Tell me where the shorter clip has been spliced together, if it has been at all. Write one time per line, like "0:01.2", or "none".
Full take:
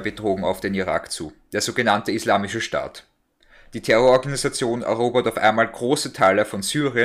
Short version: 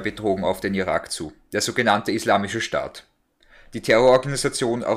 none